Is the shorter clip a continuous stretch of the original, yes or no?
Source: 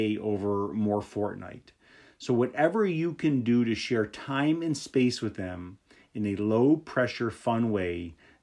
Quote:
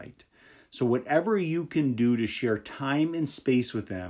yes